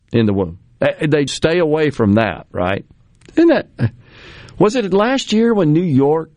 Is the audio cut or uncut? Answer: cut